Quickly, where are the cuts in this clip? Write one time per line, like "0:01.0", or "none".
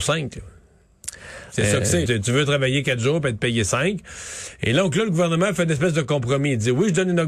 0:02.1